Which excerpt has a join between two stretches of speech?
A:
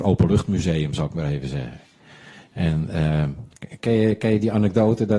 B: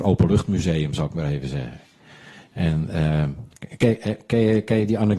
A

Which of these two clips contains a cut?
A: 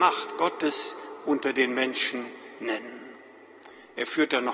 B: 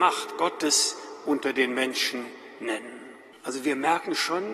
B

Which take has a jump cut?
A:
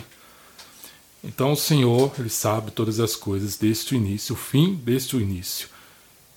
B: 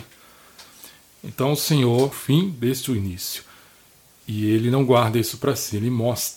B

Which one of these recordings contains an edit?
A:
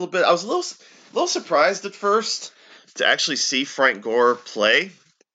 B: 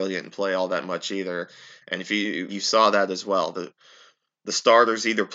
B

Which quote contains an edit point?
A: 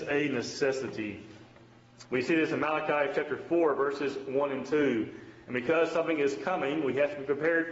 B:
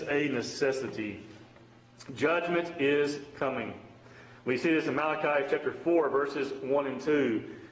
A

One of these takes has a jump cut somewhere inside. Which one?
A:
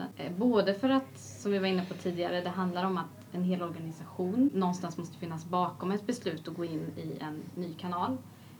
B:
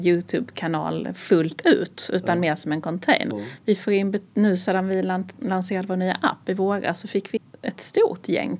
B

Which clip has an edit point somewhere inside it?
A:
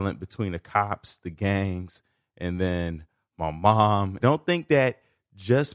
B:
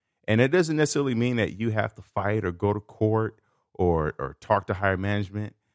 A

